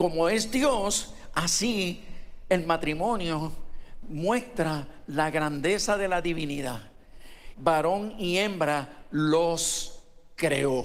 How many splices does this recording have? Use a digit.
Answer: 1